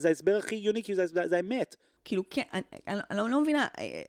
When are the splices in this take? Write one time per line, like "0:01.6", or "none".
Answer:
0:02.0